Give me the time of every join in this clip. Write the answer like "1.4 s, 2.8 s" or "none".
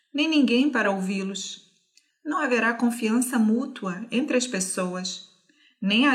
2.1 s